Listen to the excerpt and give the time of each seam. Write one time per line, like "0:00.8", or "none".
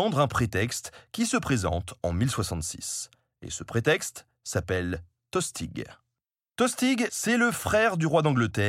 none

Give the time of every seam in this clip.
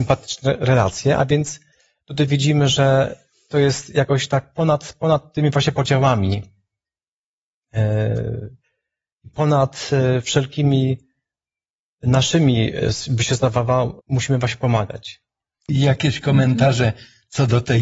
0:14.0
0:15.7

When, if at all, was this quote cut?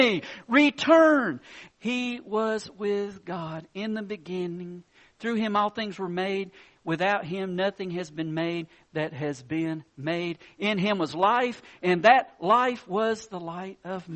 0:01.7

